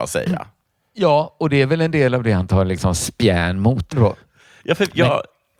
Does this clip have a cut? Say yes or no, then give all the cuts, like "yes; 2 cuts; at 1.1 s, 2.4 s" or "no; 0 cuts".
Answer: yes; 1 cut; at 3.9 s